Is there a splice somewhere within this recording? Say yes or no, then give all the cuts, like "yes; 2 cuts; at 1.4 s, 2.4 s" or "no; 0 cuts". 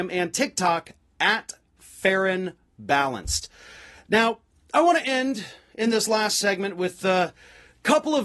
no; 0 cuts